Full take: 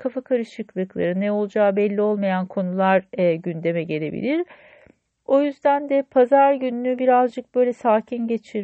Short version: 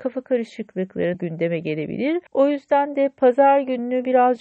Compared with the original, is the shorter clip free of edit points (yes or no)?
no